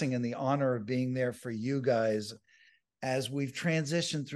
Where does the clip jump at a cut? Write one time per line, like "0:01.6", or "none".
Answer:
none